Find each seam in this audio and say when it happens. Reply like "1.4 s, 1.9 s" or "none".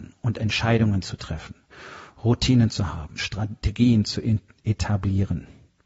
3.2 s

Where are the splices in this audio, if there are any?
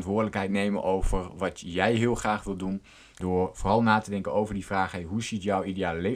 3.2 s

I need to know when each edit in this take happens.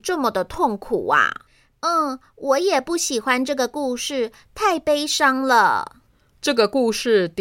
6.3 s

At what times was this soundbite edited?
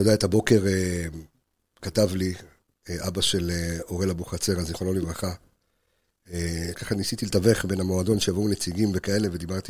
6.7 s

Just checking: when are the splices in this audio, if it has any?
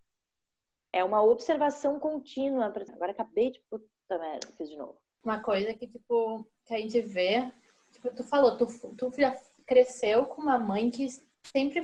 2.9 s

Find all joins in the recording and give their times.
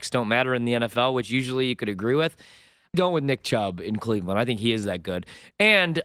2.9 s

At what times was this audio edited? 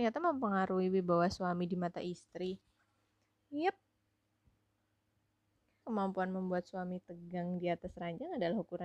5.8 s

